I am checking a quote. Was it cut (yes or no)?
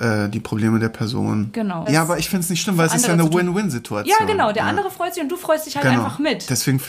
yes